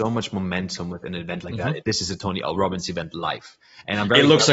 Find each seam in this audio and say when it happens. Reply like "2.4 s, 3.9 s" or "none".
1.8 s